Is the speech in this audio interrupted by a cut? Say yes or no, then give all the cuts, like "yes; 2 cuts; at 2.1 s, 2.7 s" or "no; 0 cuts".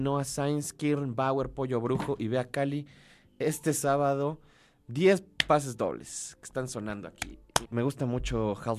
yes; 1 cut; at 7.6 s